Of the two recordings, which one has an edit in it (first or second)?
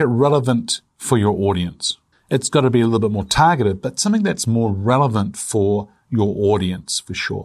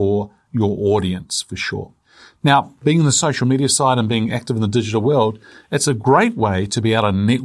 first